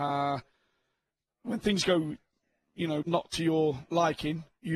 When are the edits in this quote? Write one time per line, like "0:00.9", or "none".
0:03.0